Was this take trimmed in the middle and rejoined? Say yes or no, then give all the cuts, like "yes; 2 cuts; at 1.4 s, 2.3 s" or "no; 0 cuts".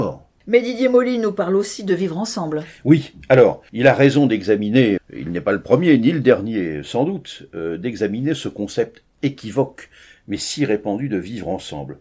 yes; 1 cut; at 5.0 s